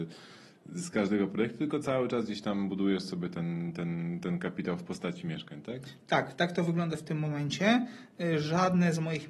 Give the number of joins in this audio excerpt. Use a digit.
0